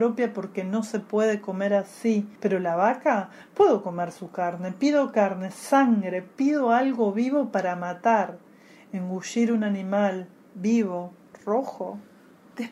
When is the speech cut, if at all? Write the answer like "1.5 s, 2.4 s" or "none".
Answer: none